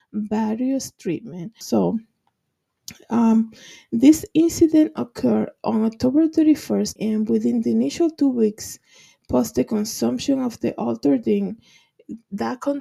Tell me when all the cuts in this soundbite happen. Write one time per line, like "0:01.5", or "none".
0:01.6
0:07.0